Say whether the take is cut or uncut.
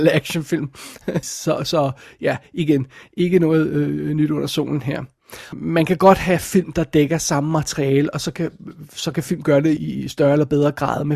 cut